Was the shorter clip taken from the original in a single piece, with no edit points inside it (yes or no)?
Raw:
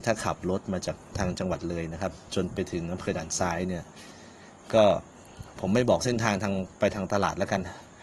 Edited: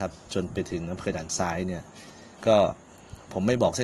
no